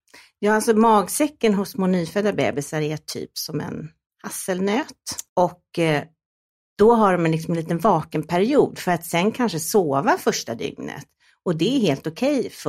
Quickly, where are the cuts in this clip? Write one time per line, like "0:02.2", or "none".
0:05.3